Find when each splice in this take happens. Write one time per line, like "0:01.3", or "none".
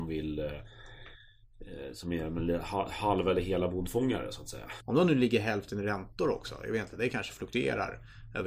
0:04.8